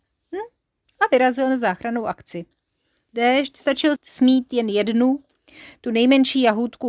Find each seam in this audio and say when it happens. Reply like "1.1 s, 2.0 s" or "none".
4.0 s